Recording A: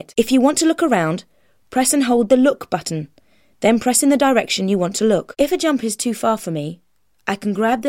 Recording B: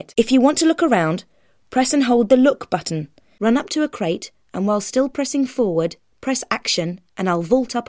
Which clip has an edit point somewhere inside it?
B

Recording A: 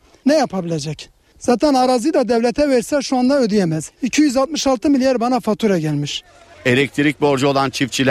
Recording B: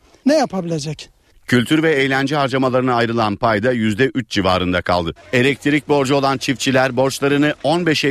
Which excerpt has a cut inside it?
B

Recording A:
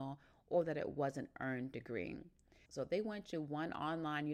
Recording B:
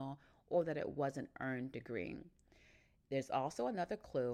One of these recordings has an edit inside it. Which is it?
A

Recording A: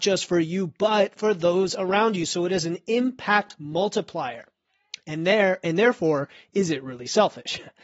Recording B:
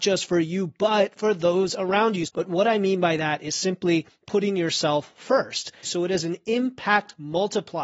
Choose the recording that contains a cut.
B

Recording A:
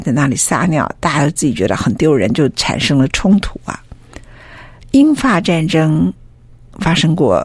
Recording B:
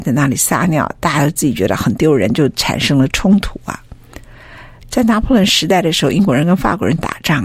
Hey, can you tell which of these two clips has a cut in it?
B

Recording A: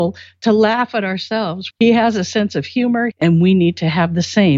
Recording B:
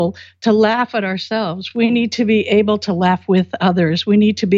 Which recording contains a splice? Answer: A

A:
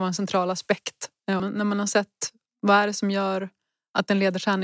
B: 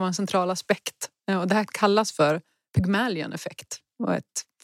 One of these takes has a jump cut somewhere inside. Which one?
A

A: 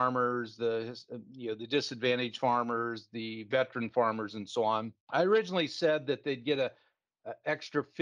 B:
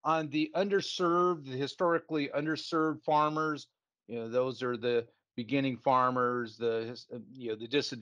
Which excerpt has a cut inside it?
A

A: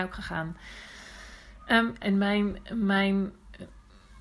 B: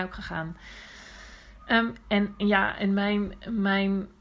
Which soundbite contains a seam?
A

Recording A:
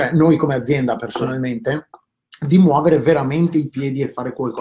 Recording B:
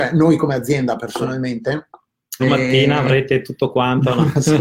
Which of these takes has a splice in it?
B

